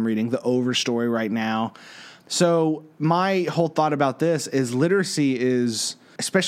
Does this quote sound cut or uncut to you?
cut